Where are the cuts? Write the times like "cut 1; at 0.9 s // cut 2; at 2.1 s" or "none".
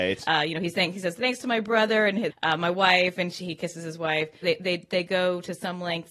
cut 1; at 2.3 s // cut 2; at 4.4 s